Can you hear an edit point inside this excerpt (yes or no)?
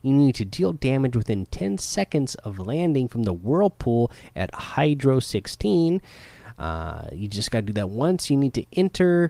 no